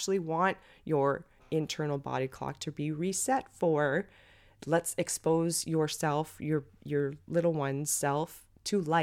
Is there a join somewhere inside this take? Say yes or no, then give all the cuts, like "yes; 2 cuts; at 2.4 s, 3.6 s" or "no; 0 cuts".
no; 0 cuts